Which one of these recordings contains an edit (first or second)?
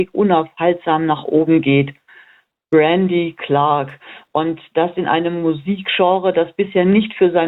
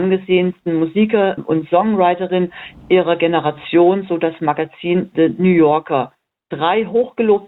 second